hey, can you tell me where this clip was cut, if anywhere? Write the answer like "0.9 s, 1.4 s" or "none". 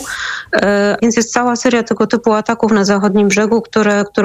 1.0 s